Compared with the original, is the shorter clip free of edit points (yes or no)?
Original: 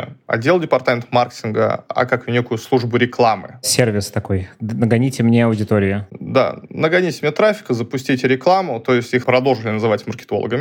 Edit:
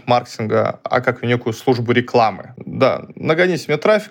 no